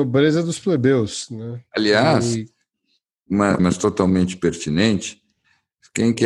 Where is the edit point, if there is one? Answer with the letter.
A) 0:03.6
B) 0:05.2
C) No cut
A